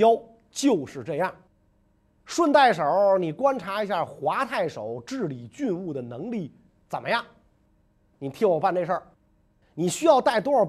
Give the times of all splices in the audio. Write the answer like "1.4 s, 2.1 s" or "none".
2.2 s